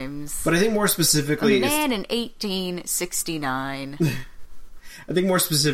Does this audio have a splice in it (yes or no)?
no